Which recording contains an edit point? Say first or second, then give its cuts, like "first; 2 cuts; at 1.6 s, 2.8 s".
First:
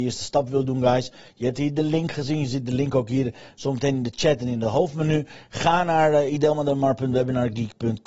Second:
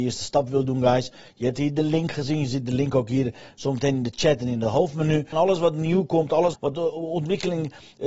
second; 2 cuts; at 5.3 s, 6.5 s